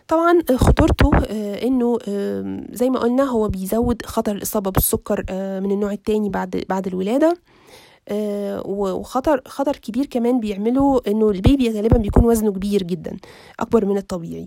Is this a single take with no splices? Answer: yes; 0 cuts

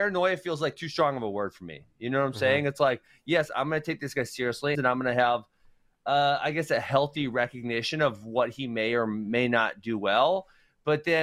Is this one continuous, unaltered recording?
no; 1 cut; at 4.7 s

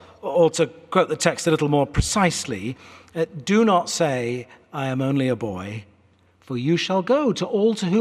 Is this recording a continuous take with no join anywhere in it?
yes; 0 cuts

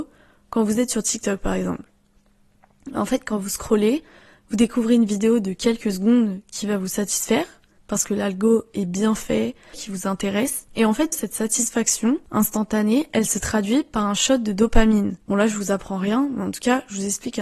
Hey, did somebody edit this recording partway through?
yes; 3 cuts; at 9.7 s, 11.1 s, 15.2 s

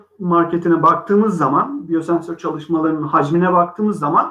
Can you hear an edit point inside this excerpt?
no; 0 cuts

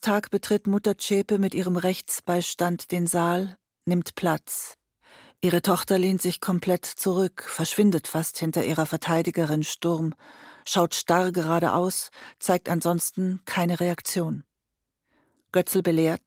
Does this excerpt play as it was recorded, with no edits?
yes; 0 cuts

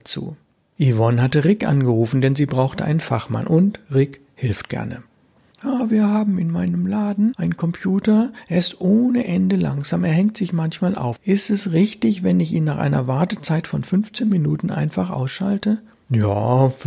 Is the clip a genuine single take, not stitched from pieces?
yes; 0 cuts

